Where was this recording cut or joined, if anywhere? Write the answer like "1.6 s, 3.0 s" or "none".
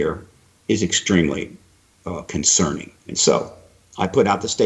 3.0 s